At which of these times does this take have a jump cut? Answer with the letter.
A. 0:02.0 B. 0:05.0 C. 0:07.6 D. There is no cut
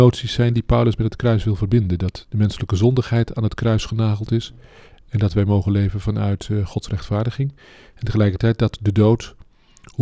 D